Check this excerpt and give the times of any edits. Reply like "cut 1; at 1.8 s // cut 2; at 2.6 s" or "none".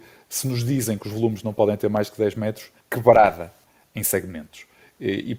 cut 1; at 2.8 s